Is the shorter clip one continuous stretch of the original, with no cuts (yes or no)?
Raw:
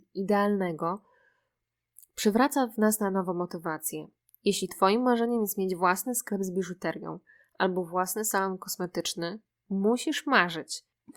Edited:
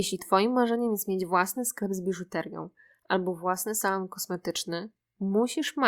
yes